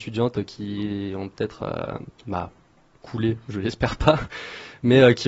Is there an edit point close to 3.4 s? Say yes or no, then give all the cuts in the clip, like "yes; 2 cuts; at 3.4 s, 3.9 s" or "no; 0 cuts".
no; 1 cut; at 2.2 s